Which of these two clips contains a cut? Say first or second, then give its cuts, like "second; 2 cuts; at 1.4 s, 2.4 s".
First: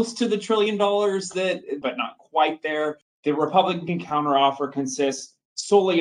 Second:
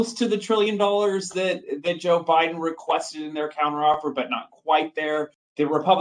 first; 1 cut; at 1.8 s